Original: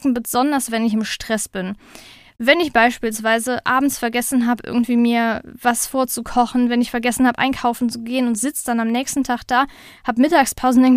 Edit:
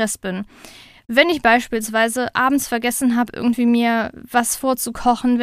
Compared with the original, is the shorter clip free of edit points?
yes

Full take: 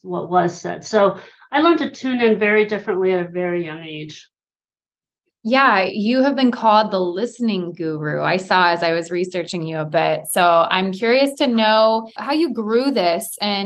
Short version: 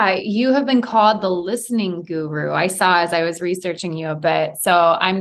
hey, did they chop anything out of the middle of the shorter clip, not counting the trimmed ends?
no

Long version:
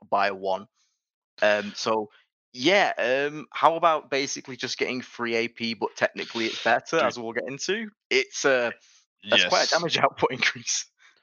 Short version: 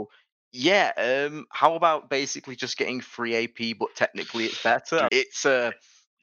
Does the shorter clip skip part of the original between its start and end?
yes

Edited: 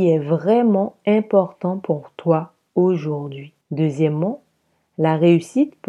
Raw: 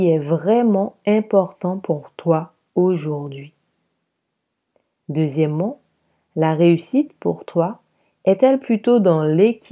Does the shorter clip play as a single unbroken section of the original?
no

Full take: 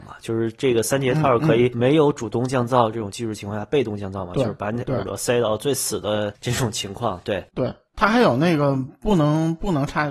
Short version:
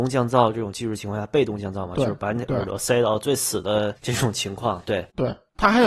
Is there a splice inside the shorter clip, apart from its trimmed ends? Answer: no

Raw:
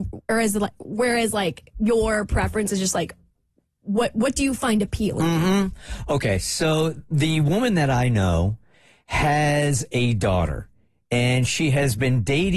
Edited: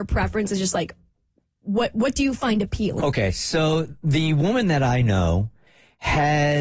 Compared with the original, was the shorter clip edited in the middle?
yes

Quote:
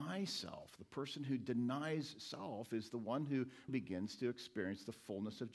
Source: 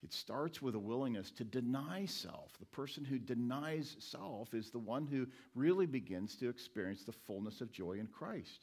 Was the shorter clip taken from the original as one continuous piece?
no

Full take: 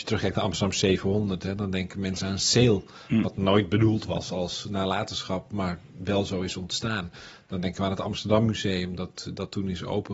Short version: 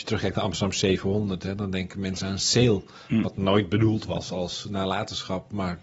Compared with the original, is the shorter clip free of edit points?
yes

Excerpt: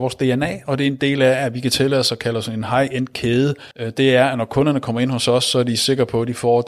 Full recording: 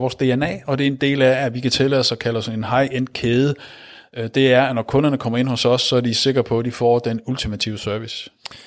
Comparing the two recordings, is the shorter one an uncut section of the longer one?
no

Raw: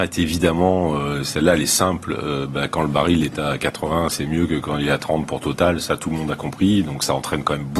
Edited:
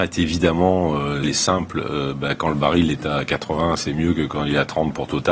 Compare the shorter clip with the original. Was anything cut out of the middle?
yes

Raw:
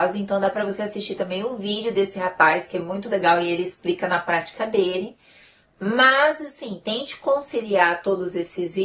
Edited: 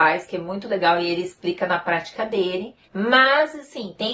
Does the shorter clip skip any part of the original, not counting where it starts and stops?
yes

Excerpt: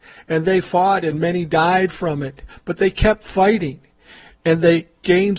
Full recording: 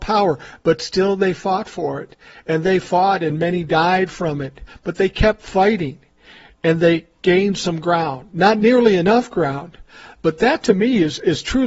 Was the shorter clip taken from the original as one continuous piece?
yes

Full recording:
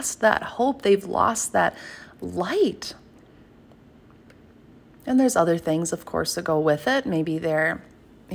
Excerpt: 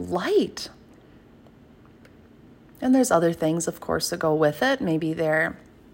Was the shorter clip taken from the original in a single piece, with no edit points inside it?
yes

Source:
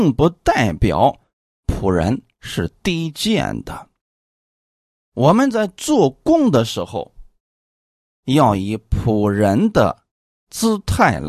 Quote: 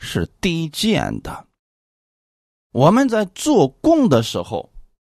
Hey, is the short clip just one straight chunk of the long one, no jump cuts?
yes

